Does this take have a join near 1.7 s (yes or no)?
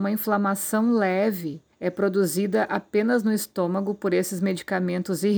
yes